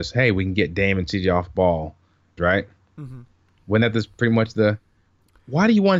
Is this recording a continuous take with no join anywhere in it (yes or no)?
no